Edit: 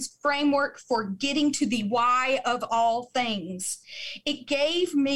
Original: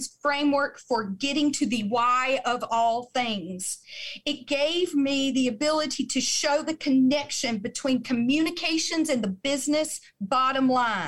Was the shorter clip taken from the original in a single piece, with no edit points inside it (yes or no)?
yes